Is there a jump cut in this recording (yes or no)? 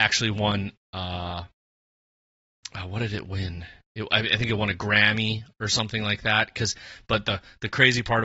no